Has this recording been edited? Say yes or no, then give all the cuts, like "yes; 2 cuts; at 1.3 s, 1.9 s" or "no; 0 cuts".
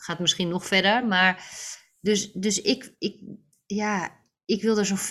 no; 0 cuts